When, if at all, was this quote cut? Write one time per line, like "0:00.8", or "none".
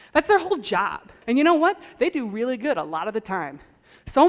0:01.2